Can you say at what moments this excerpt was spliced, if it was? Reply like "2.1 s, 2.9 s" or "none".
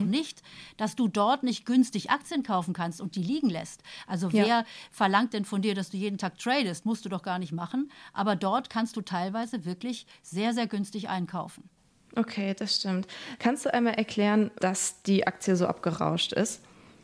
13.4 s, 14.6 s